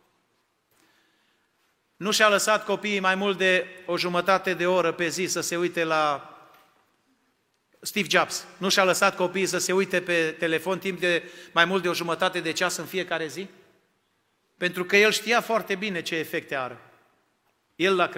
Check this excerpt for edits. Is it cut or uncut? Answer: uncut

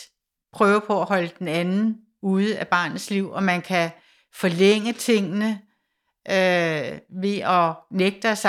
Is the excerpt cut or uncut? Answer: uncut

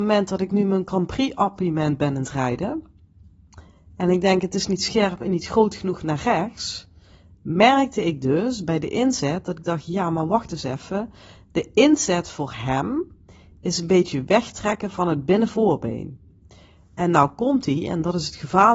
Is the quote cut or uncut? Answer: uncut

